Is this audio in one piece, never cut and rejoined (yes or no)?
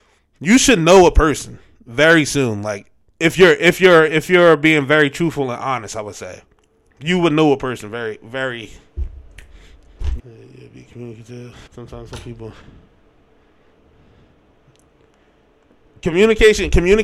no